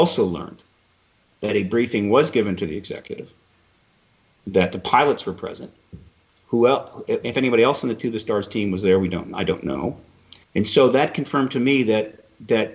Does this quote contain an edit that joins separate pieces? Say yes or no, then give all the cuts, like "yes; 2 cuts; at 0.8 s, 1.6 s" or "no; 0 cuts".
yes; 1 cut; at 10.4 s